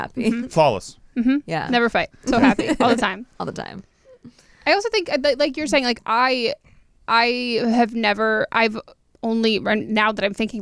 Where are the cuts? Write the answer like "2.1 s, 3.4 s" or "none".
none